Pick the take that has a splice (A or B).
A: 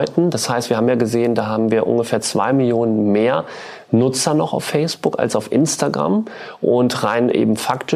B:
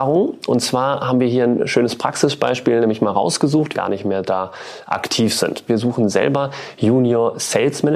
B